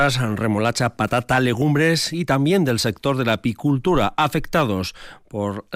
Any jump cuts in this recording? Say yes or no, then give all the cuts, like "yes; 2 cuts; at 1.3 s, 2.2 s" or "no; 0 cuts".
no; 0 cuts